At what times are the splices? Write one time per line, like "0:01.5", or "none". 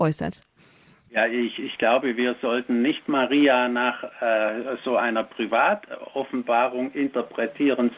none